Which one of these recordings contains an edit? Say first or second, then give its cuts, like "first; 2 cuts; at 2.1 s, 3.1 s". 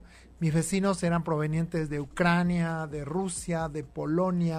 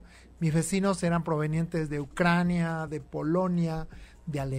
second; 1 cut; at 2.9 s